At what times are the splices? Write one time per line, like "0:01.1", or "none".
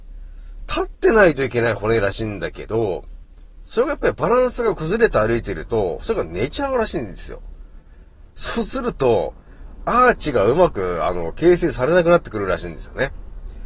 none

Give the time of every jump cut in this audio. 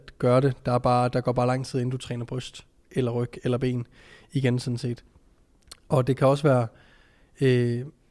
none

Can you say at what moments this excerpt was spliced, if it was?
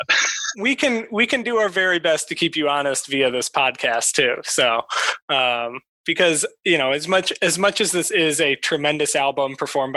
none

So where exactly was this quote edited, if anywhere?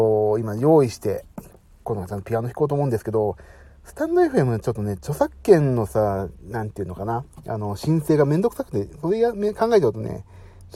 none

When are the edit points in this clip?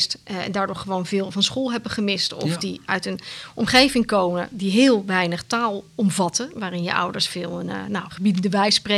none

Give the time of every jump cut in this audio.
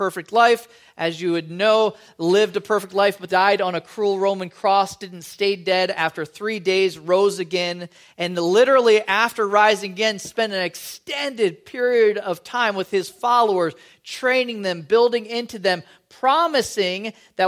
0:03.3

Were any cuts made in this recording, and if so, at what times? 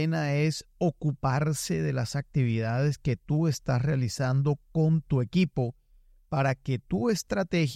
none

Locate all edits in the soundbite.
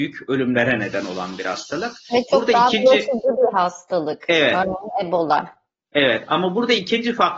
none

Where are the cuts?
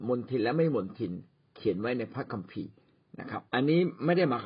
0:03.5

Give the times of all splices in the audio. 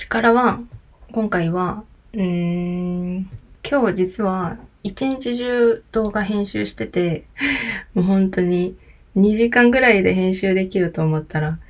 0:07.3

